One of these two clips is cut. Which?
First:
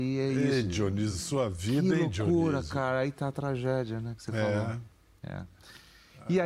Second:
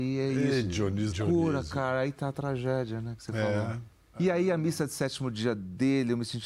second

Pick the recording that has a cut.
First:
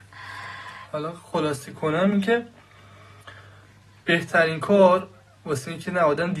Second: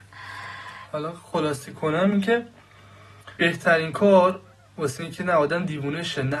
second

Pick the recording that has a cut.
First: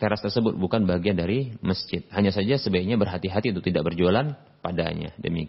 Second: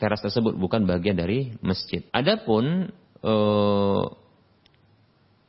second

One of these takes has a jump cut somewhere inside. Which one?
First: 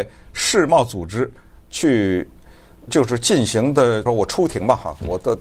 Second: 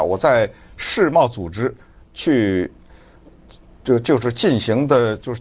first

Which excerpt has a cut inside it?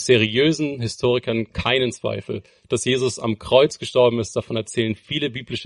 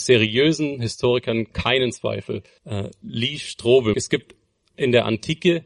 second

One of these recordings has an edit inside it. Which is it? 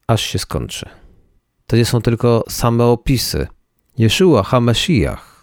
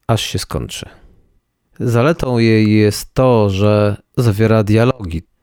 first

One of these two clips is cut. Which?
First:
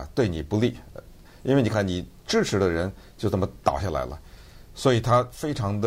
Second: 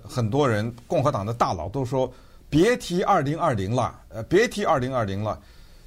first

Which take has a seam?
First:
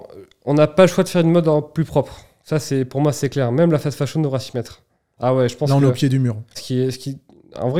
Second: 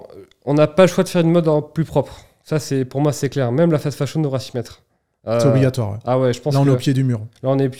first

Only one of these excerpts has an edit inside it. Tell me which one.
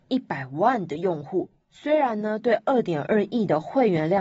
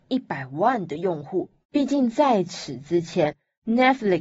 second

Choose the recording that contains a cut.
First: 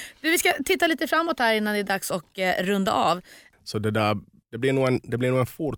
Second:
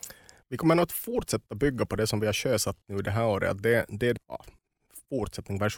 first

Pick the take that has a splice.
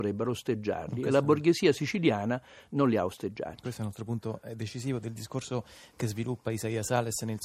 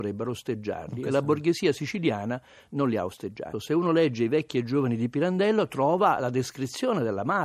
second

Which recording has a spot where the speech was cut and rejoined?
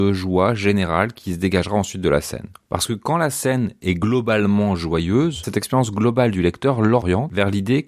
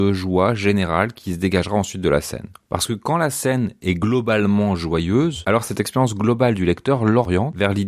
first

